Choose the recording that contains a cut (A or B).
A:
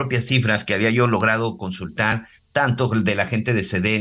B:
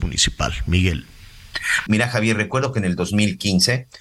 B